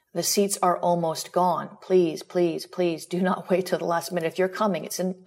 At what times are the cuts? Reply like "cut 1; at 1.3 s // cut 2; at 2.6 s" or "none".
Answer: none